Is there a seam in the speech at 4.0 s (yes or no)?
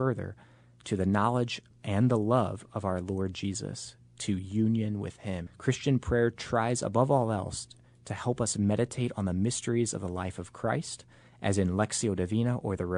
no